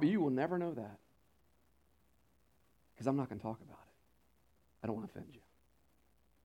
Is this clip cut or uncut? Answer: uncut